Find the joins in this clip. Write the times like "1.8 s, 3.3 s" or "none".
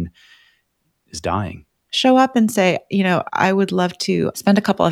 1.8 s